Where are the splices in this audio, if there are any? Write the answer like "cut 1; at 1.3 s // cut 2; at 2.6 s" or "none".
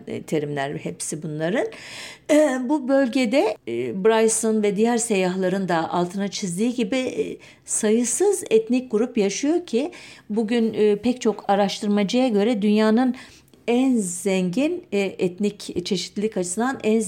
none